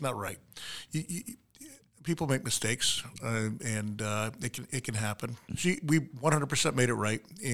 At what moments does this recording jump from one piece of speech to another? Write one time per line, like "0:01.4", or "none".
0:05.5